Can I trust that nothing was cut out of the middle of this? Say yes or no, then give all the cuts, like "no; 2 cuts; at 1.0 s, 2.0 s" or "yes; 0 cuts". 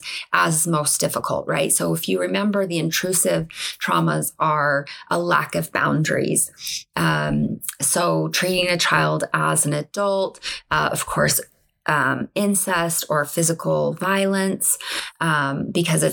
yes; 0 cuts